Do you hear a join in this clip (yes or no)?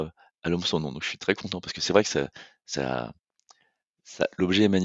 no